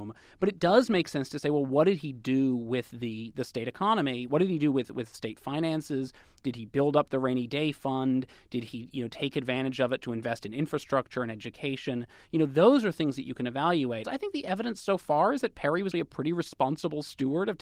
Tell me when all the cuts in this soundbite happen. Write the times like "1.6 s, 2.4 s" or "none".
14.0 s, 15.9 s